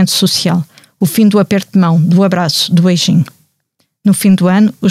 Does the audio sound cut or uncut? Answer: uncut